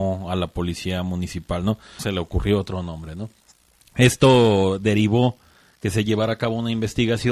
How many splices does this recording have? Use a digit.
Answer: 1